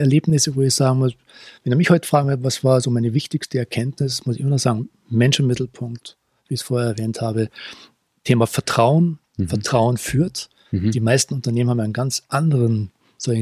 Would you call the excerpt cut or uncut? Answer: uncut